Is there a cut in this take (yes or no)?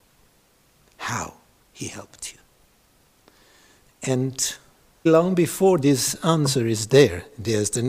yes